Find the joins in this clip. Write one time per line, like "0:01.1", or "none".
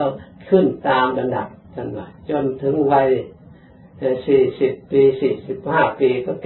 0:01.6